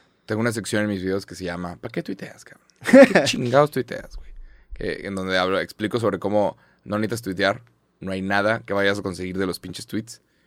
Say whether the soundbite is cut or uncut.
uncut